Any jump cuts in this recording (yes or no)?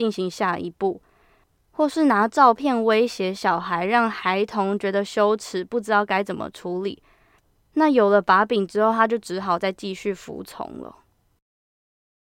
no